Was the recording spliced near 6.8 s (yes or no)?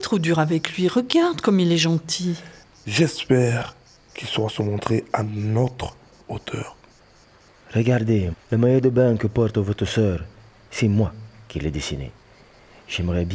no